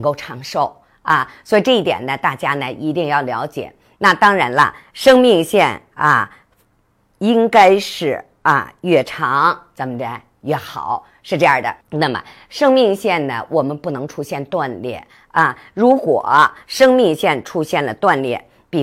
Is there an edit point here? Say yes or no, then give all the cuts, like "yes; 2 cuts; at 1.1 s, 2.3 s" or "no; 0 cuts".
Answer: yes; 1 cut; at 11.8 s